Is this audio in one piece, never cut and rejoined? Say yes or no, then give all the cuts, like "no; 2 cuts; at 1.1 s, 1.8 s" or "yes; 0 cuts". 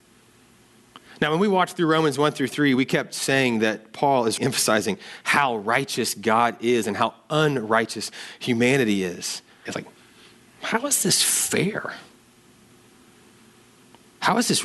no; 2 cuts; at 4.4 s, 9.7 s